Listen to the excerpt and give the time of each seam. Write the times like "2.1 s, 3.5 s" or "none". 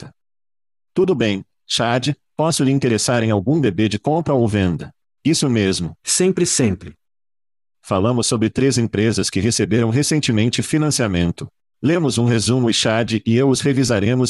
6.0 s